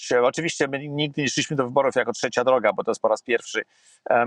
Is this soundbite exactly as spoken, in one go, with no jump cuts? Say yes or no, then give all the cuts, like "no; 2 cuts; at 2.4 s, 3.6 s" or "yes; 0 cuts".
yes; 0 cuts